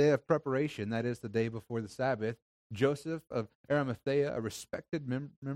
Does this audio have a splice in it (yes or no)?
no